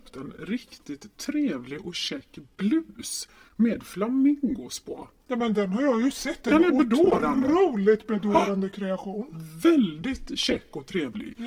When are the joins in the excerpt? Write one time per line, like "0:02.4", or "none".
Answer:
none